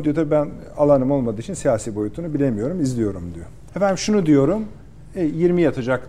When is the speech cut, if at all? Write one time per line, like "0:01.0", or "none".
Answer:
0:03.7